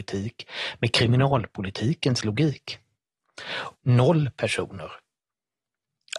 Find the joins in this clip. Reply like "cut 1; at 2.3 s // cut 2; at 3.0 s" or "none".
cut 1; at 3.7 s

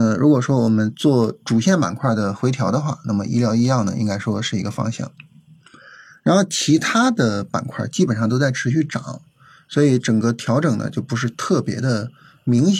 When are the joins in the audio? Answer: none

